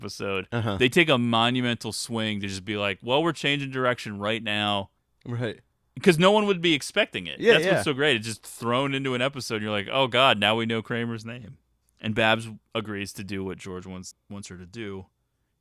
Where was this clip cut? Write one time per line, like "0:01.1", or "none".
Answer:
0:05.2